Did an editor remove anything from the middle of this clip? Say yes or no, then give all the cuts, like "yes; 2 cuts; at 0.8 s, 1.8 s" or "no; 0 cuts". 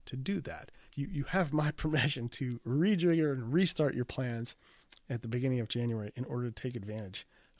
yes; 1 cut; at 2.3 s